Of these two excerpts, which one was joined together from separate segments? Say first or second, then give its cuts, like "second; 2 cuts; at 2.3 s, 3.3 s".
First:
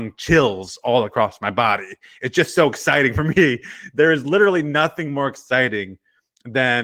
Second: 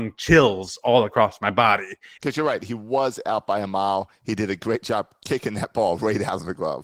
second; 1 cut; at 2.2 s